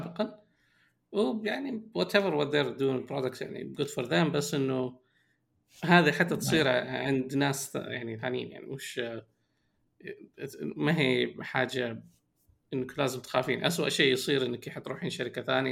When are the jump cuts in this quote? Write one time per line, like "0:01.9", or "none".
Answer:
none